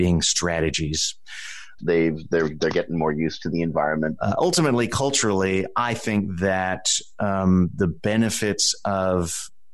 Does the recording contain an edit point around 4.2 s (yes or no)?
yes